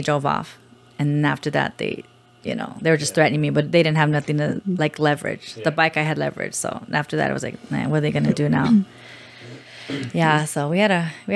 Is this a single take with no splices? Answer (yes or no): yes